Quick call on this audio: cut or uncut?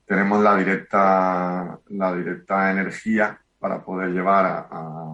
uncut